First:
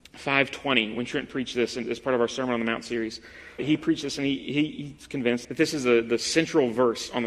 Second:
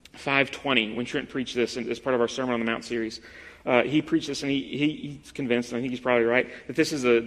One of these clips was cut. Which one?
first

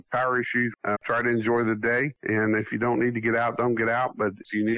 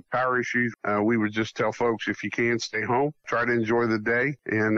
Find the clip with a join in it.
first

